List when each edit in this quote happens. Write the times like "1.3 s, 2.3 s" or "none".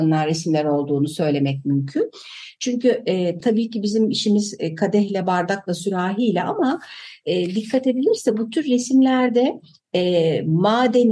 none